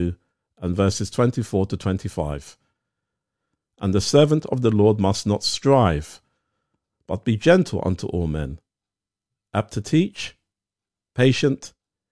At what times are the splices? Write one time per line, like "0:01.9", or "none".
none